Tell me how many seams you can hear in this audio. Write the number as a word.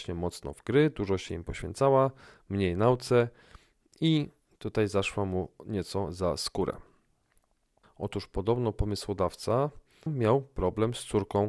two